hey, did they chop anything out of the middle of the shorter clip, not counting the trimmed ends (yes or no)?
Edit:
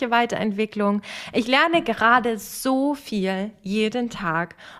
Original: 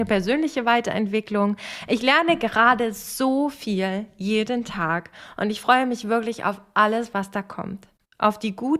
no